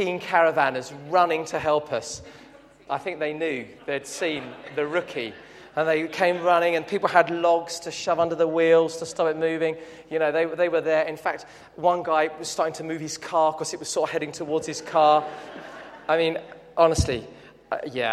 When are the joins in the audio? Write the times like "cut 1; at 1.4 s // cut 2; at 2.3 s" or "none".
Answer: cut 1; at 2.9 s